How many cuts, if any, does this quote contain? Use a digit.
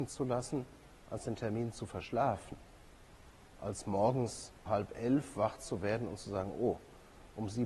1